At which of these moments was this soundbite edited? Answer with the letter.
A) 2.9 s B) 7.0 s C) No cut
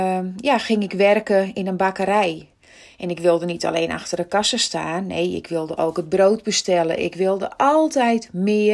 B